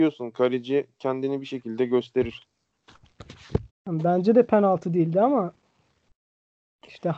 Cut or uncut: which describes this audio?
cut